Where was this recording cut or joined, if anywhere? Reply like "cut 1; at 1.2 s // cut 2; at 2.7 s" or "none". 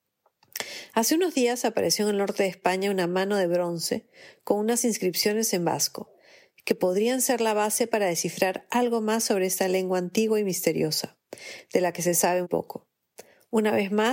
cut 1; at 12.4 s